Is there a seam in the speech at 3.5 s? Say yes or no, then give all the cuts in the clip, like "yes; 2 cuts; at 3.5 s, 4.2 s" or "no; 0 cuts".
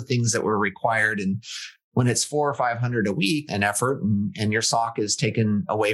yes; 1 cut; at 3.5 s